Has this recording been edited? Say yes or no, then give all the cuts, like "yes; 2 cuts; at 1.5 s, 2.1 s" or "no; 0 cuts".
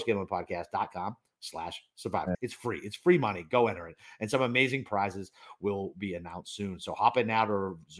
yes; 1 cut; at 2.3 s